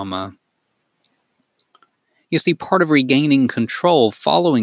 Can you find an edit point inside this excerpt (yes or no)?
no